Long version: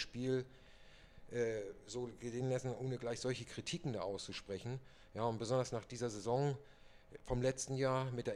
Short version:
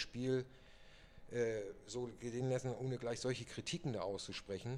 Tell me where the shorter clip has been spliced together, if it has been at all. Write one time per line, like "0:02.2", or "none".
none